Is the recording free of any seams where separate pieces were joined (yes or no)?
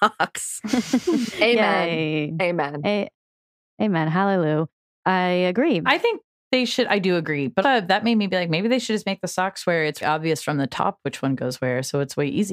no